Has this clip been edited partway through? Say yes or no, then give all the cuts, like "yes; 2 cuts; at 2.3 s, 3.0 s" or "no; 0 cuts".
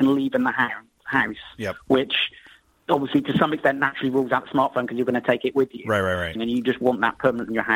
yes; 1 cut; at 6.3 s